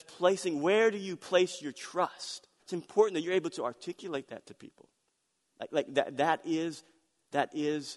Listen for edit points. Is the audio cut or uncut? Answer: cut